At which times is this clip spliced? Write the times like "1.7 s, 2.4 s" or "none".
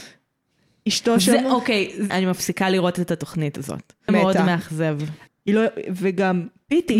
2.1 s, 4.1 s, 5.3 s